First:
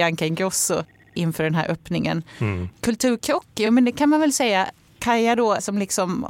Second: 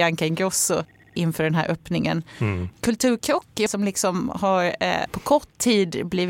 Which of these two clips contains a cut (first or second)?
second